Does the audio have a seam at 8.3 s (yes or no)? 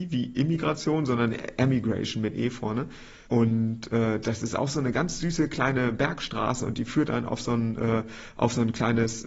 no